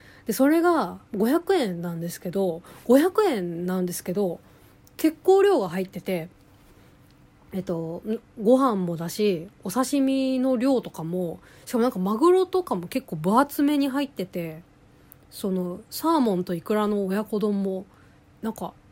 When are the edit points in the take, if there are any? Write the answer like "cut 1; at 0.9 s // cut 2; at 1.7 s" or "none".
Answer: cut 1; at 1.1 s

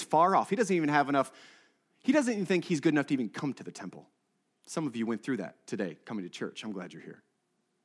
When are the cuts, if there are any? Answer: none

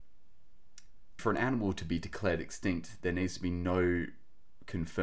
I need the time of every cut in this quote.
cut 1; at 1.2 s

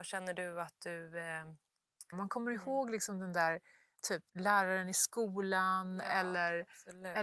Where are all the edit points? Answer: cut 1; at 2.1 s // cut 2; at 4.3 s

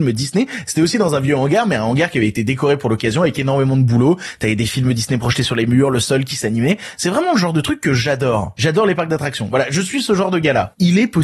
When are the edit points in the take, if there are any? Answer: none

